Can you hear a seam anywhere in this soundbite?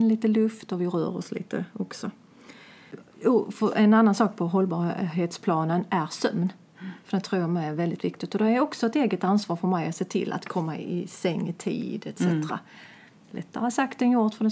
no; 0 cuts

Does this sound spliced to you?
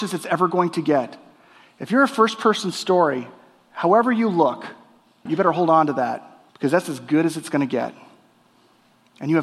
yes; 2 cuts; at 5.3 s, 6.5 s

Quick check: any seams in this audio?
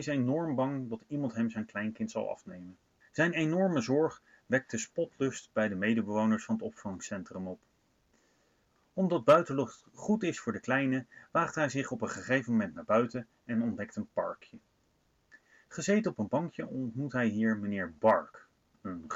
yes; 1 cut; at 3.0 s

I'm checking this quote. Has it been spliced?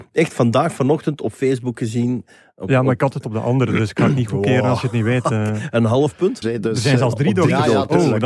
yes; 1 cut; at 6.4 s

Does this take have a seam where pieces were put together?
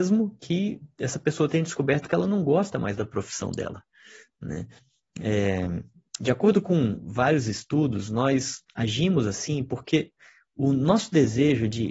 no; 0 cuts

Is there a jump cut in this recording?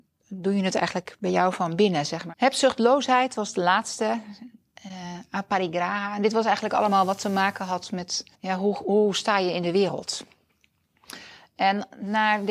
yes; 2 cuts; at 2.3 s, 8.3 s

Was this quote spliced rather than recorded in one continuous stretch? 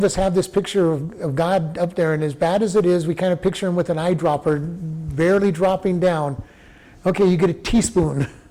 no; 0 cuts

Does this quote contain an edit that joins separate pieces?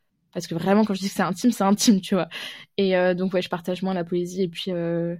no; 0 cuts

